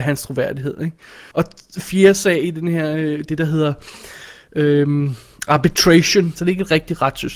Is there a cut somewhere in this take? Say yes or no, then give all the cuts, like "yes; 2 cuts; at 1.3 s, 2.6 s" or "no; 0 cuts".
yes; 3 cuts; at 1.3 s, 3.3 s, 6.4 s